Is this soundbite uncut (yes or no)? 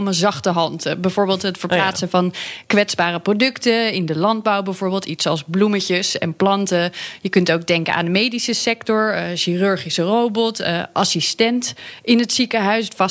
yes